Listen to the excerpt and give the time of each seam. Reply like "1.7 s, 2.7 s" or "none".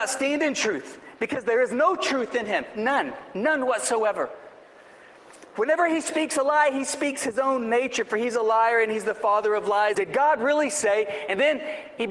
9.9 s